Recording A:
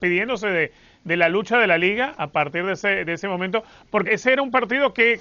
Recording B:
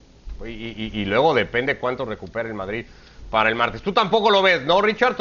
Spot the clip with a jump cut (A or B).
A